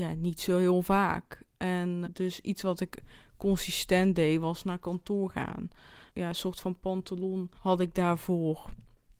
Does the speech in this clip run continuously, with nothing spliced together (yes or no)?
no